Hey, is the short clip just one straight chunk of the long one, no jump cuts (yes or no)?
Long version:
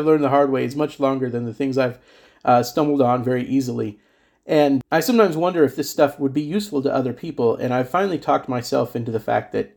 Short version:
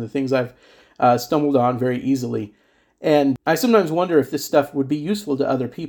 yes